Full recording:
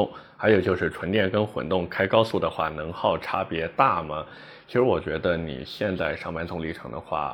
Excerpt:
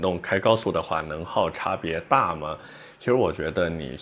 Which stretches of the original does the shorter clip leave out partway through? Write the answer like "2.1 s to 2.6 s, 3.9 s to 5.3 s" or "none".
none